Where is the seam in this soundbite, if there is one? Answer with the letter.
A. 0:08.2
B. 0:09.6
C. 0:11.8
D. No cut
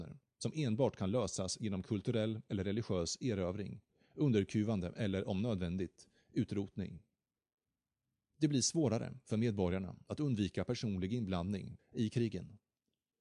C